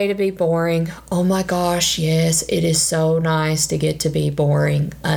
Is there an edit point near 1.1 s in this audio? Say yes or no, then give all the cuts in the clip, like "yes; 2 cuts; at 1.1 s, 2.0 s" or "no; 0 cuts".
no; 0 cuts